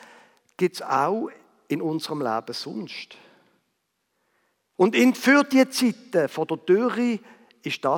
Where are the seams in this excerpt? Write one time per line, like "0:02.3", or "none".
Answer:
0:04.8